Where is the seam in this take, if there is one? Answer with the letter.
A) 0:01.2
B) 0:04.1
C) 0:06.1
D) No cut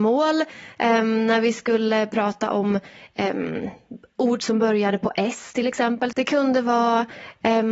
C